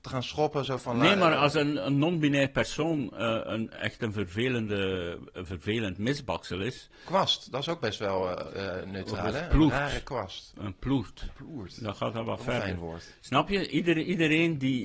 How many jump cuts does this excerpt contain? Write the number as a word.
zero